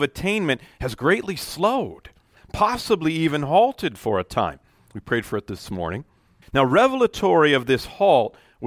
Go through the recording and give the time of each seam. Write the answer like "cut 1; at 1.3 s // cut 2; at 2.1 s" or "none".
cut 1; at 4.8 s // cut 2; at 6.4 s